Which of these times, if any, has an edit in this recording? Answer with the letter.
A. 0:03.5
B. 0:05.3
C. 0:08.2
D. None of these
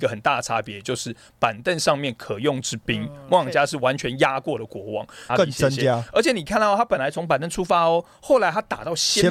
B